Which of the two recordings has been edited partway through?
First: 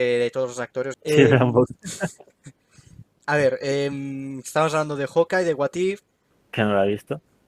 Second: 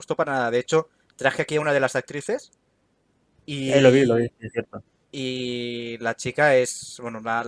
first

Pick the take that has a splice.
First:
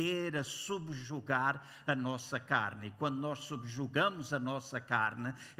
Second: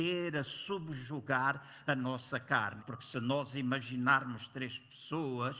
second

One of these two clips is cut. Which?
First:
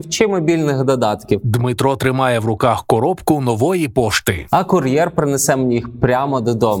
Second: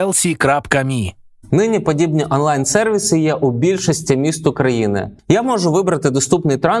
second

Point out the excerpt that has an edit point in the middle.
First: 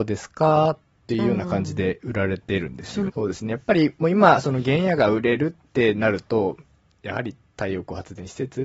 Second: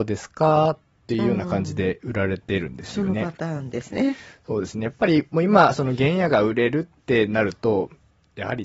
first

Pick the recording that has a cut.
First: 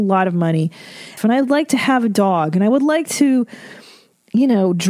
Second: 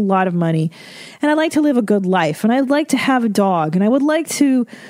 first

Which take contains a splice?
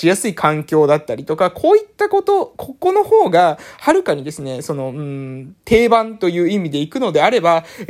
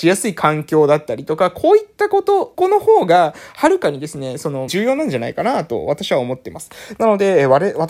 second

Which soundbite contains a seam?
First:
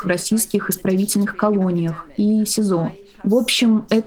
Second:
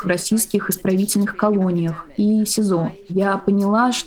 second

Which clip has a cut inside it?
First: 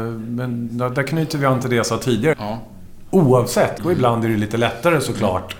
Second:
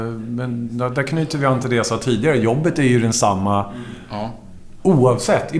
first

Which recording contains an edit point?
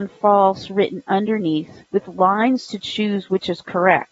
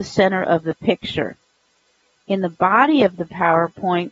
first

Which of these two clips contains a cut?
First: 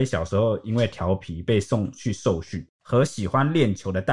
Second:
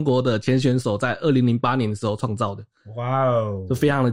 first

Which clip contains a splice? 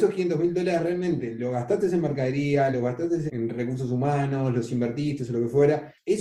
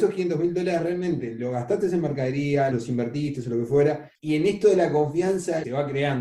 second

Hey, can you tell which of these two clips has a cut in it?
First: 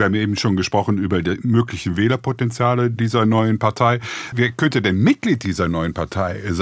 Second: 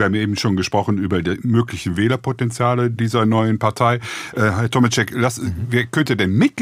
first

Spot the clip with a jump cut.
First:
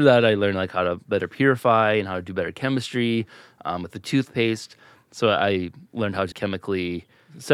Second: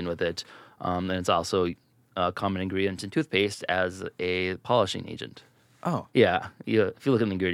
first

